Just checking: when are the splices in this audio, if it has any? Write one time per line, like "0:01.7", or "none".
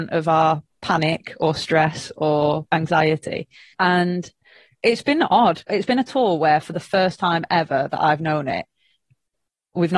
0:03.7
0:05.7